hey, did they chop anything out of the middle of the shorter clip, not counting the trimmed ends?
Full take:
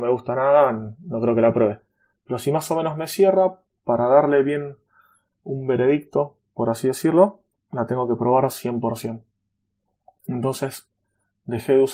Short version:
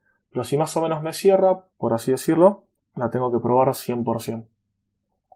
yes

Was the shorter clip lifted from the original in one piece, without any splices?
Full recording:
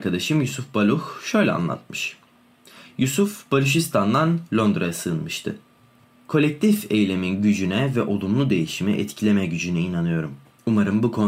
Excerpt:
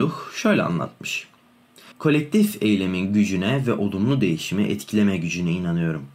no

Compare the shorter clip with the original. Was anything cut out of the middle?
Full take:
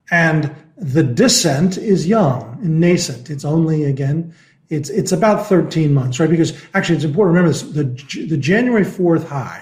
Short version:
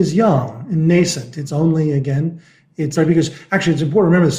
yes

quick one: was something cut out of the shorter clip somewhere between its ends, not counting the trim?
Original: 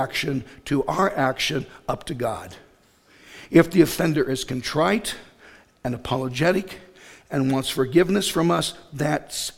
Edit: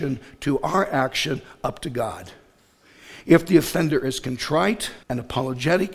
yes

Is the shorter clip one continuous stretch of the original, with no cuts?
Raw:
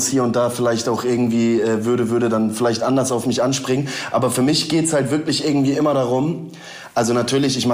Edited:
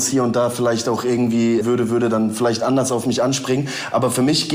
no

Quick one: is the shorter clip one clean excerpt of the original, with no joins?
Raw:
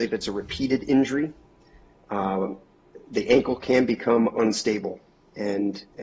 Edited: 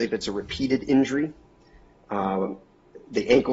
yes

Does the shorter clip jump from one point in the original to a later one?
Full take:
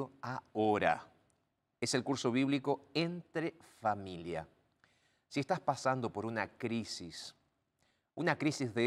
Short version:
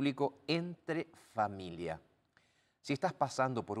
no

